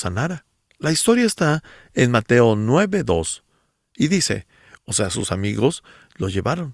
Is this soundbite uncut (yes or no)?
no